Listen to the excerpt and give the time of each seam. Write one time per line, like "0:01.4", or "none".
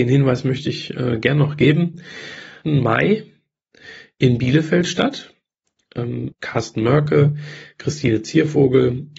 0:02.6
0:06.3